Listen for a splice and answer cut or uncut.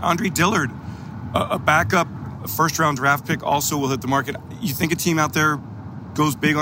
uncut